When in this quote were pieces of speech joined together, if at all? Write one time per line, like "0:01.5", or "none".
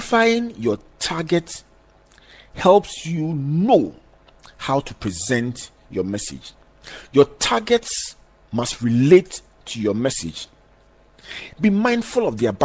0:11.6